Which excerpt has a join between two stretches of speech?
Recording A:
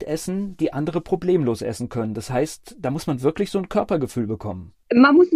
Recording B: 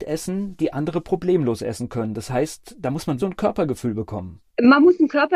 B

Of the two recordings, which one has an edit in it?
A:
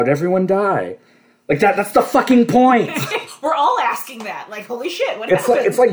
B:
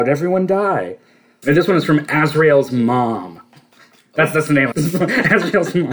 B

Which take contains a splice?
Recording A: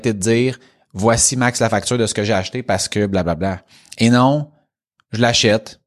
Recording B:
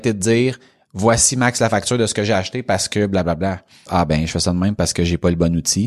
B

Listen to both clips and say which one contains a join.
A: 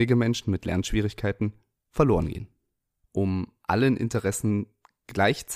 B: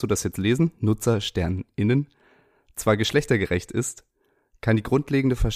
A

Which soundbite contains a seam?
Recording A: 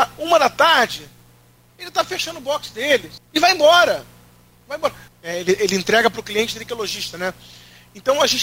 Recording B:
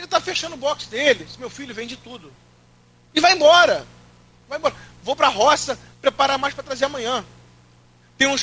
A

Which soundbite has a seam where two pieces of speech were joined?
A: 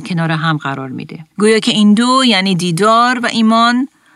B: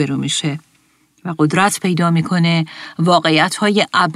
A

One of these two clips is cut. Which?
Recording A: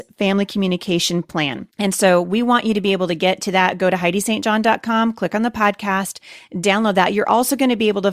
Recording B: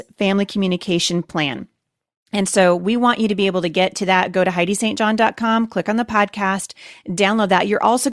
A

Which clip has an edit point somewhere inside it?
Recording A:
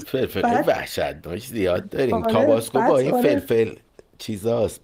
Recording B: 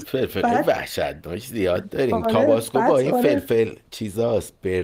B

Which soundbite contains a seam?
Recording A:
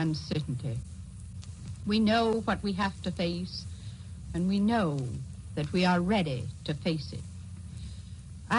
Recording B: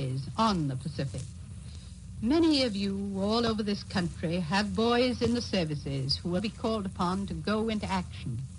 B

